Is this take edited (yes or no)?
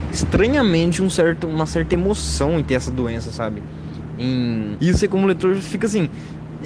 yes